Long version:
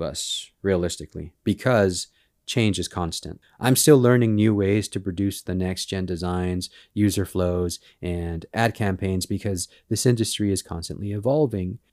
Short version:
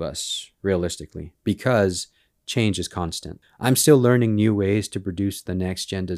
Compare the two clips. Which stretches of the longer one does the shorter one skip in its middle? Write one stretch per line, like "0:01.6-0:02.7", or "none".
none